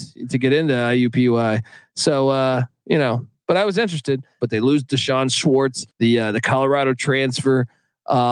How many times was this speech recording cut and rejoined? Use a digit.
2